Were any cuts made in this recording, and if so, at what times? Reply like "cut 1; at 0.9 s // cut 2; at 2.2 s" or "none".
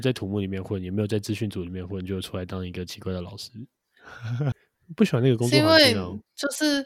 cut 1; at 4.5 s